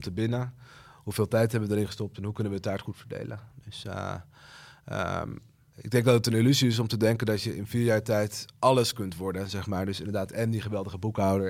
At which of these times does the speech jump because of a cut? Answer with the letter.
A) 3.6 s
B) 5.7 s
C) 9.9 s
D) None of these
B